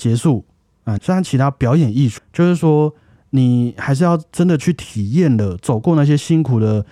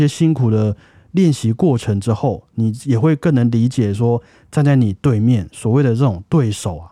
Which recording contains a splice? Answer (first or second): first